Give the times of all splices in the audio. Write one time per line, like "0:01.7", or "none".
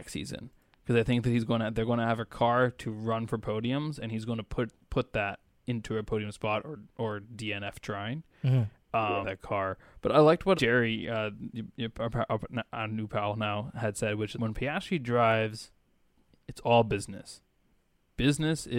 0:09.2
0:10.5
0:14.3